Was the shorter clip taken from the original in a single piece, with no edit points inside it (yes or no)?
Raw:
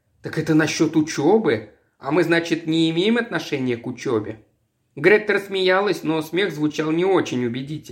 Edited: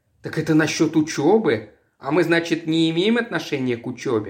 yes